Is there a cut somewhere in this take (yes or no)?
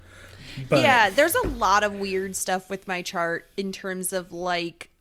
no